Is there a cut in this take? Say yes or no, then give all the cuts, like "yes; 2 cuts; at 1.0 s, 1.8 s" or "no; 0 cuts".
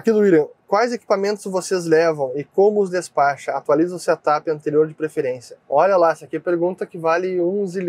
yes; 1 cut; at 5.6 s